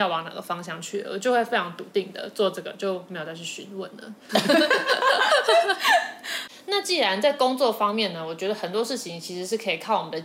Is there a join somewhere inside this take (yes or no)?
yes